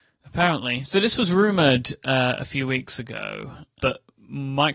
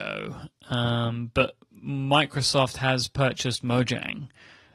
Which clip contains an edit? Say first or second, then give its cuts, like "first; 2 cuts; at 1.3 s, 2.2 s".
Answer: first; 1 cut; at 3.8 s